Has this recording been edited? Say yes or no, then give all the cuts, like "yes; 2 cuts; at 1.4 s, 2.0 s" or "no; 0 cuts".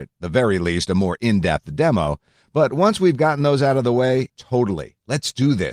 yes; 1 cut; at 4.3 s